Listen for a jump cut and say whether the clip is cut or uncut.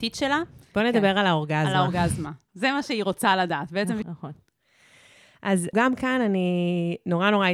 cut